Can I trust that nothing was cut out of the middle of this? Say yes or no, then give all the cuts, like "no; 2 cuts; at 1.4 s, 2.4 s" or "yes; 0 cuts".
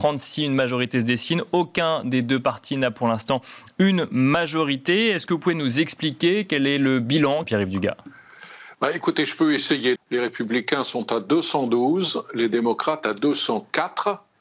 no; 2 cuts; at 7.4 s, 10.0 s